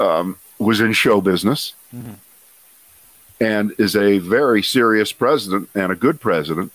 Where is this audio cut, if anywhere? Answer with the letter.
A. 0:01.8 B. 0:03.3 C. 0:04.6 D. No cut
A